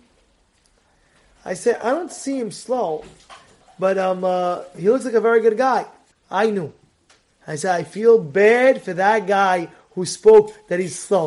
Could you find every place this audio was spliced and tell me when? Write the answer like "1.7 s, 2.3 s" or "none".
6.1 s